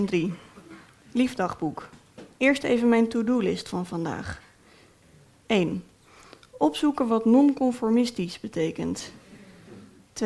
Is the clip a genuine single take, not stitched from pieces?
yes; 0 cuts

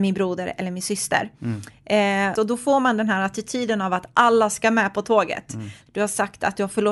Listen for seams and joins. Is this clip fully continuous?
no; 2 cuts; at 2.4 s, 5.9 s

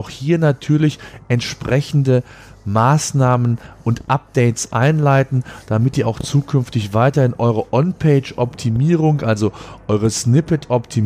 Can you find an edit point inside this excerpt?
no; 0 cuts

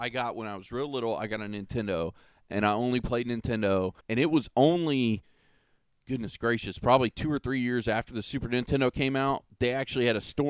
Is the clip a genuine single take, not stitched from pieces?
no; 1 cut; at 4.0 s

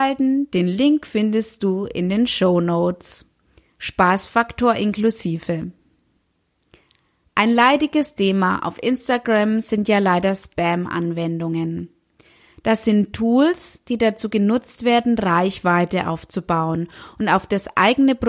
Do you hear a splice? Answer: no; 0 cuts

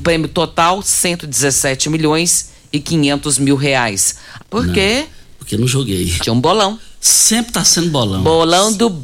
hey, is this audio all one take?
no; 2 cuts; at 4.4 s, 6.2 s

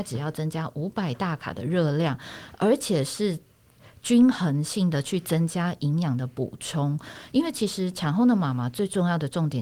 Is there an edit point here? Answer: no; 0 cuts

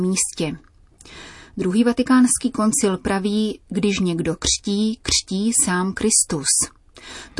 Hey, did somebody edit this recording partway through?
no; 0 cuts

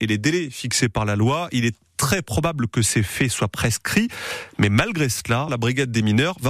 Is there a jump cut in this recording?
yes; 1 cut; at 5.5 s

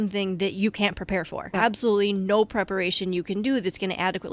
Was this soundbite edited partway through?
yes; 1 cut; at 1.5 s

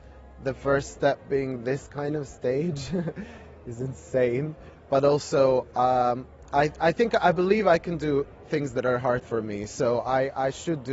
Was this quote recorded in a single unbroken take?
yes; 0 cuts

